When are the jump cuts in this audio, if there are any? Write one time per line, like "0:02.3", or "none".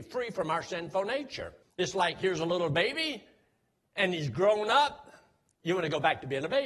0:01.6
0:05.6